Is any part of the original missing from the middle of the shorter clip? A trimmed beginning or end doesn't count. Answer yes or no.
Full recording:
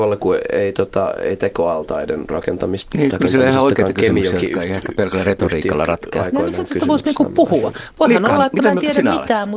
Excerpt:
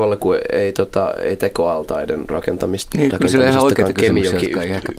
no